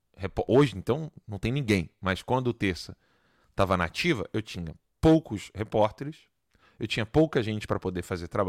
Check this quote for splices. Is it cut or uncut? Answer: uncut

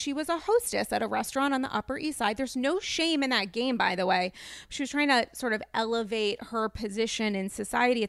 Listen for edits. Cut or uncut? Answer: uncut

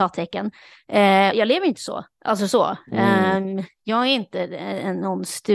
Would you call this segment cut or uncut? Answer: cut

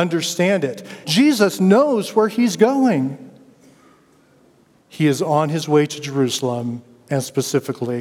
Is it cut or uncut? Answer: cut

